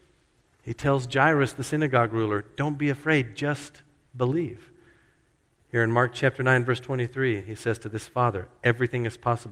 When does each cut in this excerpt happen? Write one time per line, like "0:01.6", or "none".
none